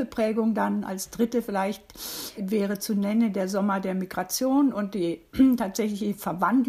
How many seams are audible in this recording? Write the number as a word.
one